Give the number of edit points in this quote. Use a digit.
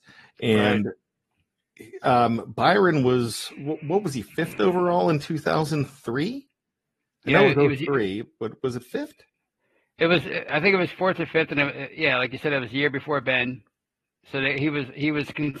0